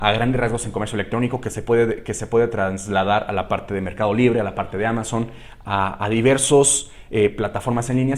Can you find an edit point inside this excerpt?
no; 0 cuts

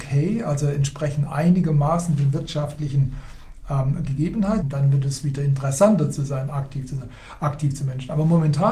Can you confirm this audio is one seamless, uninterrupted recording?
no; 1 cut; at 4.6 s

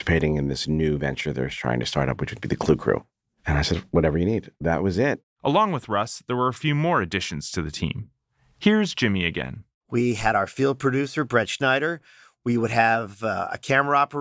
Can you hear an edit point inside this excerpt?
no; 0 cuts

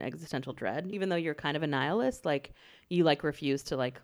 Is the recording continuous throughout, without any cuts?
no; 1 cut; at 0.9 s

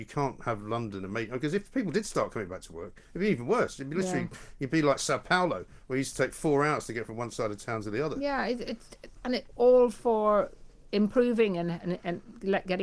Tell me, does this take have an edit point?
no; 0 cuts

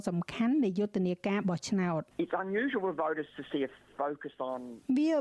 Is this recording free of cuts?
no; 1 cut; at 2.1 s

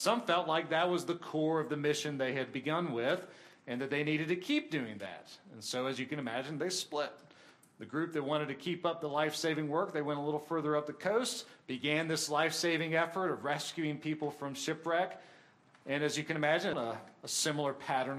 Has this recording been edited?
yes; 2 cuts; at 11.6 s, 16.7 s

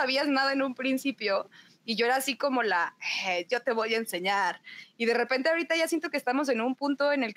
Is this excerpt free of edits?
yes; 0 cuts

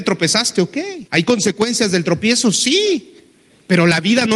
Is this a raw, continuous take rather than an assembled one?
no; 1 cut; at 1.1 s

